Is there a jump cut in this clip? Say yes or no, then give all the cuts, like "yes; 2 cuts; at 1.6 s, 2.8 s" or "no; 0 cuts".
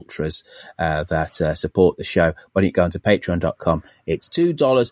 no; 0 cuts